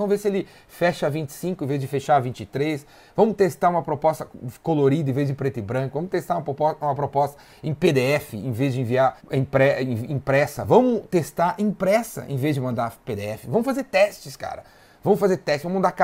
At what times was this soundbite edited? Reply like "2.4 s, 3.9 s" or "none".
9.2 s